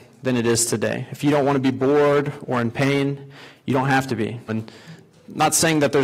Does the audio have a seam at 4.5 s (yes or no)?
yes